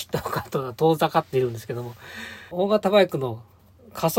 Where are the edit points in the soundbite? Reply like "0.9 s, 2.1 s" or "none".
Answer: 2.5 s